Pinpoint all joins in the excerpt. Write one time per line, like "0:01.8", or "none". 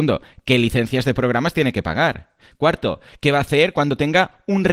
0:02.5